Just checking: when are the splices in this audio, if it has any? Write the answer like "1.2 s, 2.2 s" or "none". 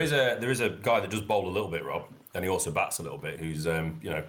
3.4 s